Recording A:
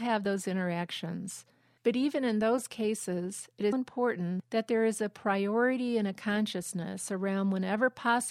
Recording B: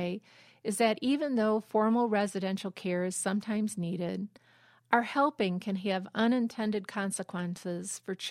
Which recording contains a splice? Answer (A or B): A